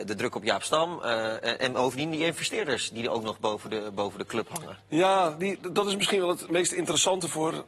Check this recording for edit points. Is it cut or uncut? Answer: uncut